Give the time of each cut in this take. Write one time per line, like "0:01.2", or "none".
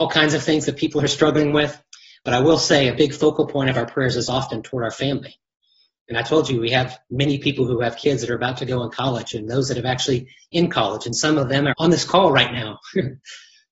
0:11.7